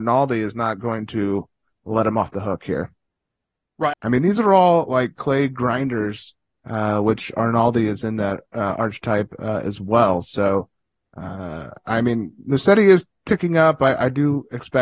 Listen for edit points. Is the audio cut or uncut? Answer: cut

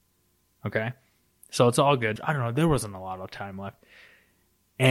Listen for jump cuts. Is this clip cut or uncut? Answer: cut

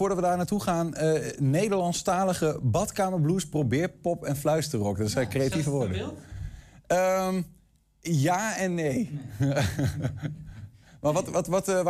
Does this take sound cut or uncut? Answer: uncut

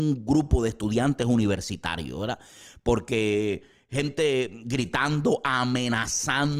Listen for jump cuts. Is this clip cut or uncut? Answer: uncut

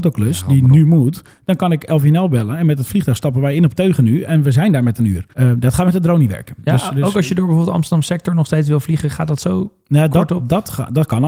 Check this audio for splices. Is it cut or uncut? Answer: cut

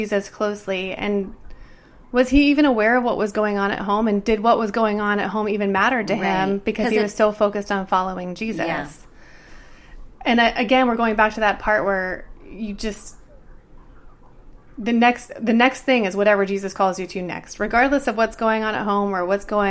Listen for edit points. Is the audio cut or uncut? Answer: uncut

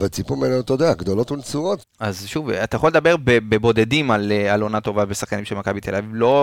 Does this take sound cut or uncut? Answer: cut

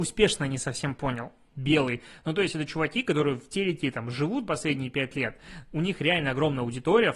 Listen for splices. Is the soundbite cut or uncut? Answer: cut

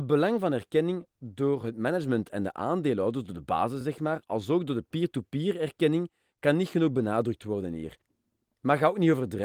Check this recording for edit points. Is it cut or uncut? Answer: uncut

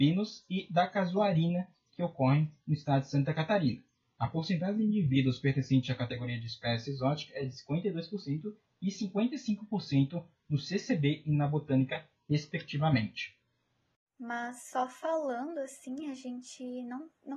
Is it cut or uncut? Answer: uncut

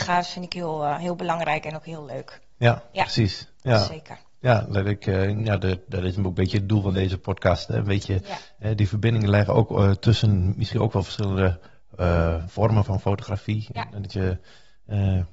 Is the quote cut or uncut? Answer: uncut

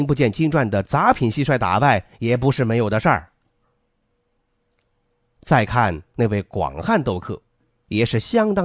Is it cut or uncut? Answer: uncut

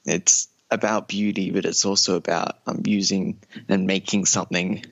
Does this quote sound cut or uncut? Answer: uncut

